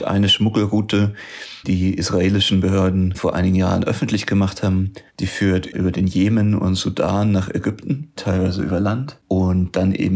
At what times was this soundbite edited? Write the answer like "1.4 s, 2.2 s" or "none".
1.6 s, 5.1 s, 8.2 s

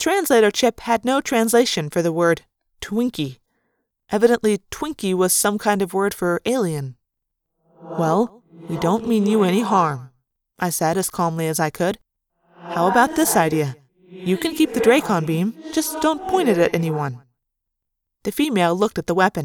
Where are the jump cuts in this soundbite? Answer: none

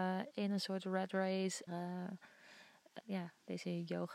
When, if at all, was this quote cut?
1.7 s, 3.0 s

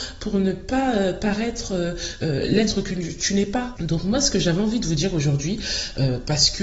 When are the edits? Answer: 3.8 s

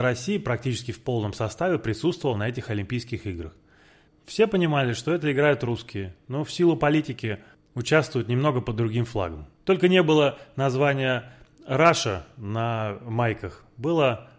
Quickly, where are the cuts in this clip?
4.1 s, 9.6 s

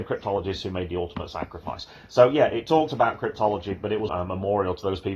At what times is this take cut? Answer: 4.1 s

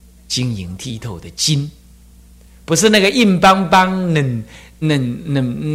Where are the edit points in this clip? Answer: 4.8 s

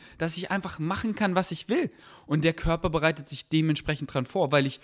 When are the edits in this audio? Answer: none

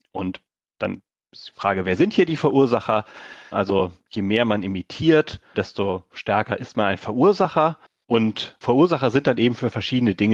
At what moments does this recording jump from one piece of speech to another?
3.5 s, 5.5 s

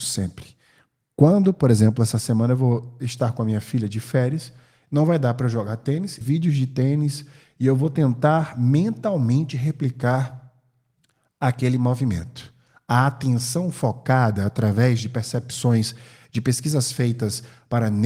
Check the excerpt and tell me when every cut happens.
6.2 s

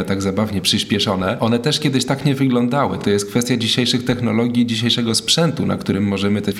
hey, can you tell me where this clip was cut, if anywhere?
none

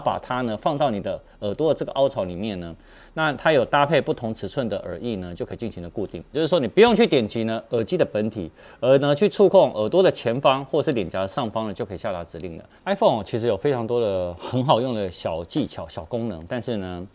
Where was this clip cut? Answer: 6.3 s, 12.8 s

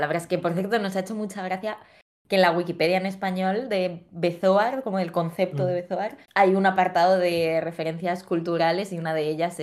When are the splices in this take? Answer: 6.2 s

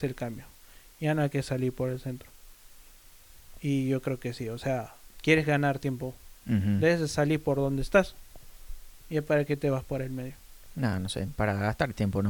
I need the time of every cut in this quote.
none

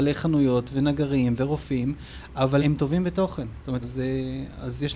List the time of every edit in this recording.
2.6 s, 3.8 s

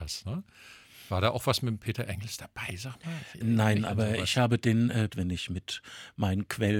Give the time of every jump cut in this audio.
3.4 s, 5.1 s

